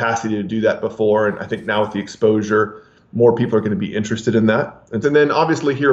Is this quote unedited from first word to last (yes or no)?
no